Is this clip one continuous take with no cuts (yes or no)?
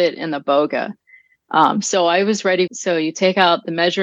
no